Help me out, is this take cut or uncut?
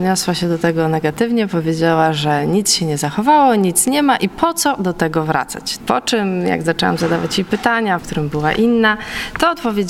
cut